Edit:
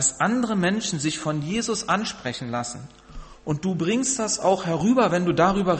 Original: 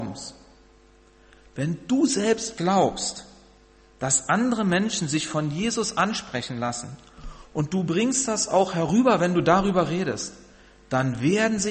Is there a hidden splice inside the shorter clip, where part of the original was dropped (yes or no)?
no